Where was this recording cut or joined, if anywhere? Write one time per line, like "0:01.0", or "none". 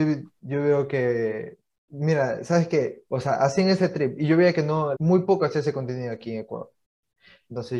0:03.1
0:04.9